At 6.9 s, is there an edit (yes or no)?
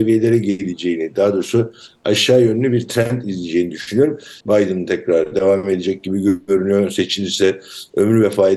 no